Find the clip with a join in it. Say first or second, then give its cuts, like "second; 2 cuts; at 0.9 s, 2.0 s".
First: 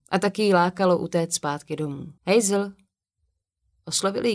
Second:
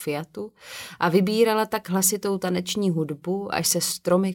first; 1 cut; at 2.2 s